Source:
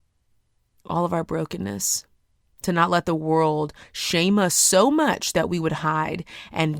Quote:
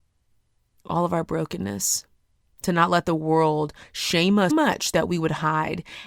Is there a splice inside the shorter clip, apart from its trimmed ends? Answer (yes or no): yes